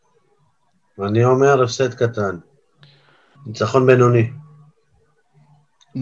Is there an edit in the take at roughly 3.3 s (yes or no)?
yes